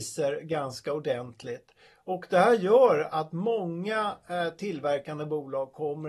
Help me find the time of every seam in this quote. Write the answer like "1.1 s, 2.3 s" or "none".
none